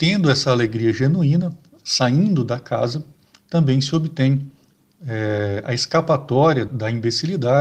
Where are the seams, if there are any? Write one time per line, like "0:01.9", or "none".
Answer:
0:06.7